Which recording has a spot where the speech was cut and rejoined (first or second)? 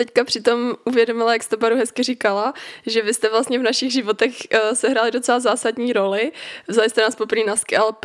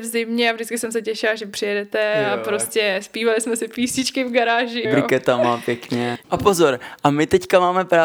second